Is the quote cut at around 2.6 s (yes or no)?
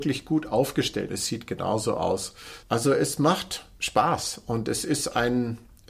yes